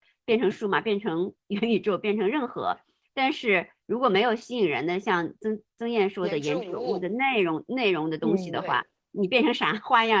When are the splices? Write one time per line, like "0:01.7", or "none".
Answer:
none